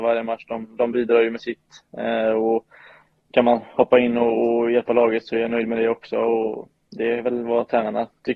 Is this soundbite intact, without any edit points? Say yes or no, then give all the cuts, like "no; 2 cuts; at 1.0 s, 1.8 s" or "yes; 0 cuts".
yes; 0 cuts